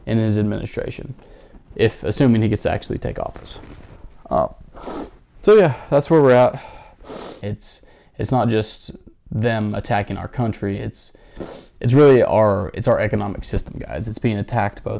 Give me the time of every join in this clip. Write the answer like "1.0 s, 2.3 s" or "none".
7.4 s